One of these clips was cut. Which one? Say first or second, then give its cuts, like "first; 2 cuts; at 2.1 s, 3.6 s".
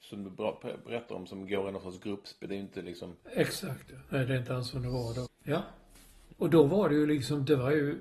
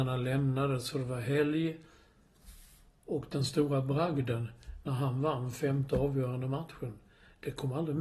first; 2 cuts; at 5.3 s, 6.3 s